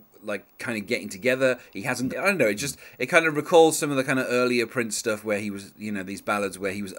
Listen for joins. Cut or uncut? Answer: cut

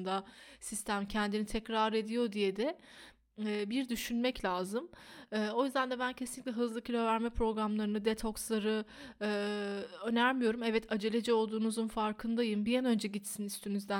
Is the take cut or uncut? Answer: uncut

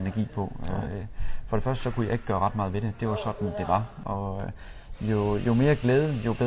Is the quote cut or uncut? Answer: cut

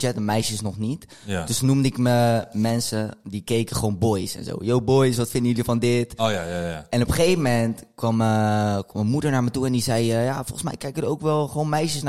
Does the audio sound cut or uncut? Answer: uncut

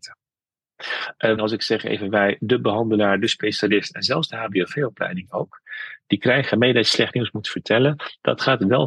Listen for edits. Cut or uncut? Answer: cut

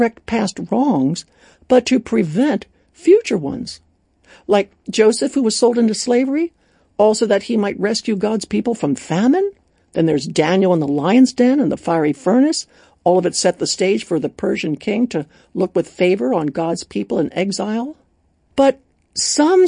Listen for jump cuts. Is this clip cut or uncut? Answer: uncut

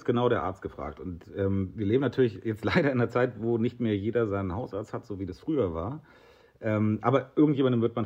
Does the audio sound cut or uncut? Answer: uncut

